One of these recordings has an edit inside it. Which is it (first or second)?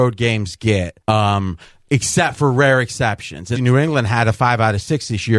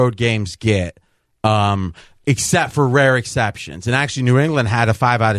first